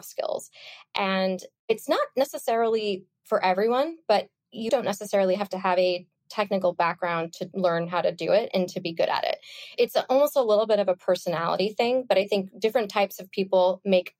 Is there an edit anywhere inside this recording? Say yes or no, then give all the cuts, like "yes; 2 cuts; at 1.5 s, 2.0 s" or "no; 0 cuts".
yes; 1 cut; at 4.7 s